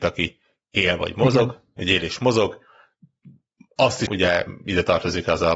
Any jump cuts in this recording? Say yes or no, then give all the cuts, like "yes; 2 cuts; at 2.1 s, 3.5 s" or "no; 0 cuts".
yes; 1 cut; at 4.1 s